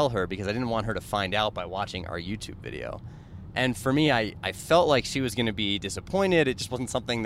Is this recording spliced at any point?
no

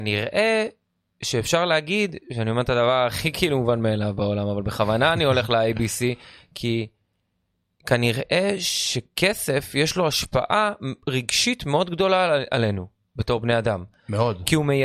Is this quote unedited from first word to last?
yes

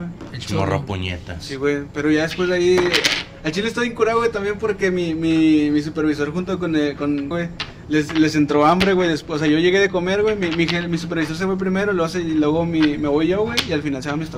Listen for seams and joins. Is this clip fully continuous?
no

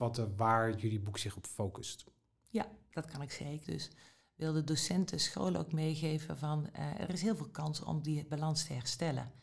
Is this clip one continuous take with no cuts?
no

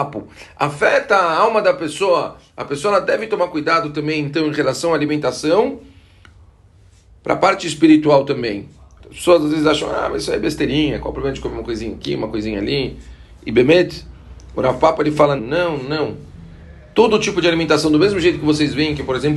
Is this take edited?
yes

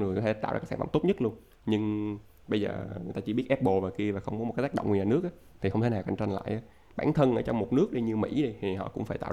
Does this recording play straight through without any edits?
yes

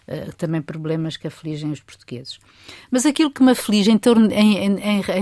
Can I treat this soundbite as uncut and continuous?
yes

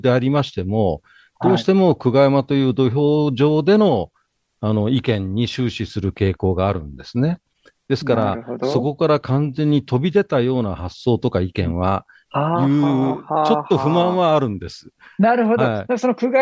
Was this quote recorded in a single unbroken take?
no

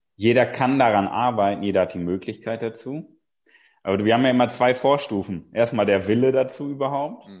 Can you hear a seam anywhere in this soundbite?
no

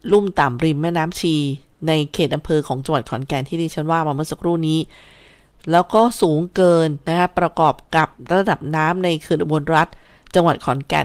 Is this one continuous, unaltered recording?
yes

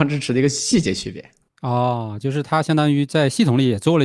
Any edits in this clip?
no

